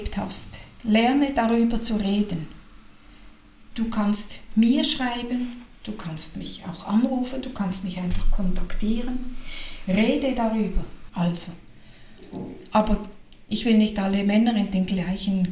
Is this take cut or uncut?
cut